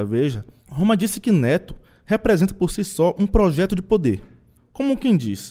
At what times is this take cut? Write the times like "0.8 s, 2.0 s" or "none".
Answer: 4.6 s